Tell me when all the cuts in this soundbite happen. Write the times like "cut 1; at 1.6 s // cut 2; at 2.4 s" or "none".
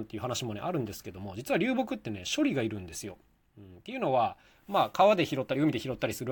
none